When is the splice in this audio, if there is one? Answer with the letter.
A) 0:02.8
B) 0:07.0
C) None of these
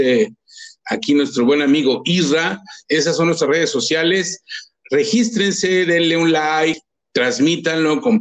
A